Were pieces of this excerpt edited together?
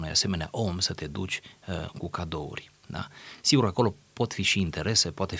no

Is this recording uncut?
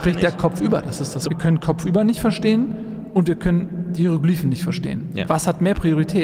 no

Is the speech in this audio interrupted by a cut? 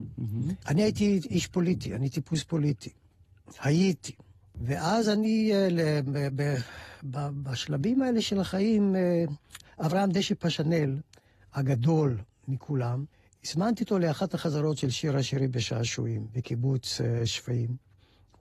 no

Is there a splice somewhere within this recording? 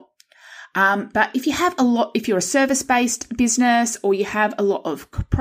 no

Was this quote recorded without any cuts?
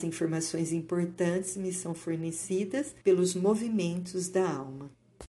no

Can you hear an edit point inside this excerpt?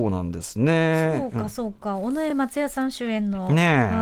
no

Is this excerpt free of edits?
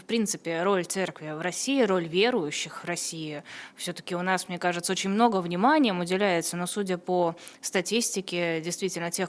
yes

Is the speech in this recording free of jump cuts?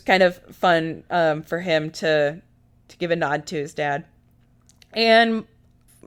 yes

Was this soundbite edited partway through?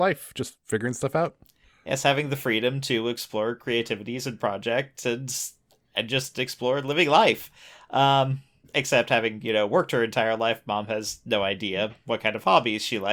no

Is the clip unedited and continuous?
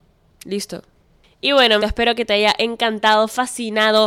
no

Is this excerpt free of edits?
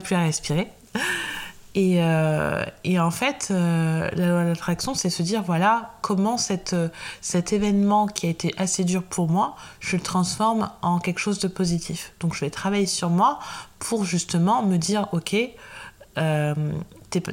yes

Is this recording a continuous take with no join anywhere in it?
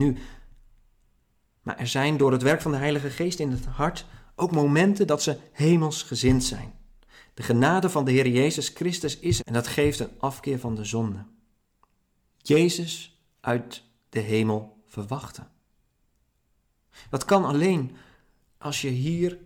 no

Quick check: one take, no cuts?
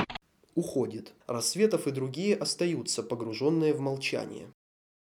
yes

